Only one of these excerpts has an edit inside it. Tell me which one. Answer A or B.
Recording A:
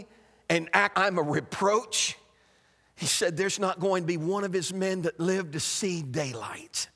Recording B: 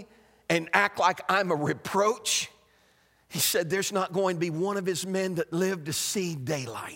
A